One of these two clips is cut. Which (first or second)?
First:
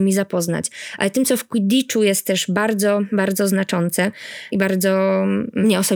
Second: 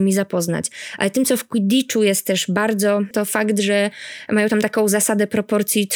second